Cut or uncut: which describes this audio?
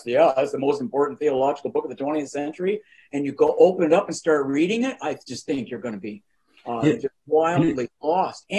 uncut